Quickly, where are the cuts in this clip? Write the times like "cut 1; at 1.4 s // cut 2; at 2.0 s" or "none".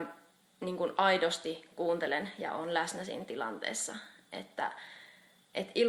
none

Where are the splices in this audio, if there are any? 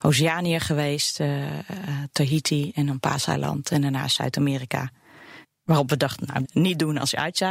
cut 1; at 5.4 s // cut 2; at 6.4 s

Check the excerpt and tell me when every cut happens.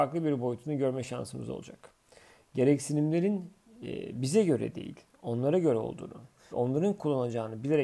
cut 1; at 6.5 s

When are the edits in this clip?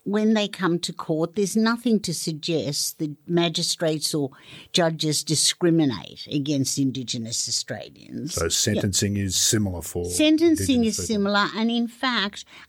none

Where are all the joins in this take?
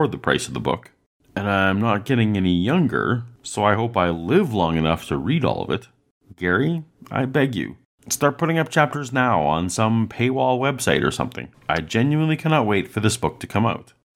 cut 1; at 11.5 s

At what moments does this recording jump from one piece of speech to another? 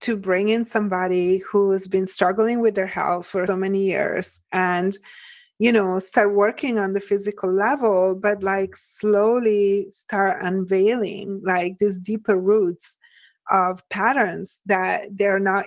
cut 1; at 3.5 s

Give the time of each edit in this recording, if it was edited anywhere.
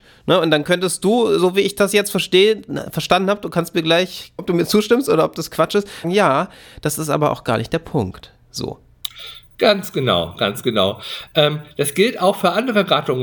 cut 1; at 4.4 s // cut 2; at 6.0 s

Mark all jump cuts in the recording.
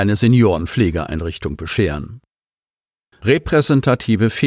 cut 1; at 3.1 s

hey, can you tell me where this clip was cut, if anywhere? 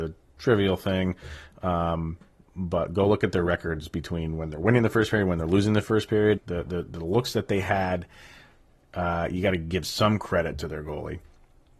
cut 1; at 6.4 s

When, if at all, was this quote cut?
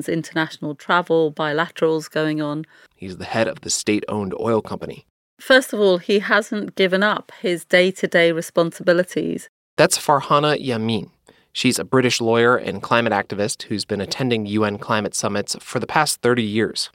cut 1; at 2.9 s

